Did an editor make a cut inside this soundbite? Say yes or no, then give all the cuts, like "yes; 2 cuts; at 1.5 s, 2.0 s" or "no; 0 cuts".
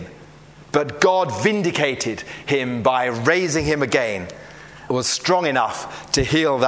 yes; 1 cut; at 4.9 s